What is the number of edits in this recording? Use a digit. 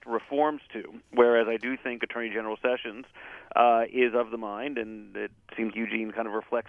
1